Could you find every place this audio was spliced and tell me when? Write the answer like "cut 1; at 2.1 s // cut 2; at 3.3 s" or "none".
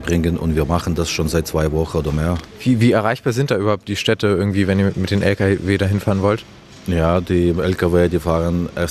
none